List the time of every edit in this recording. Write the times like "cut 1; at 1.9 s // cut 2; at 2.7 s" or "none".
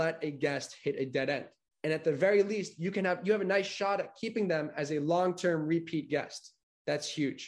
cut 1; at 1.7 s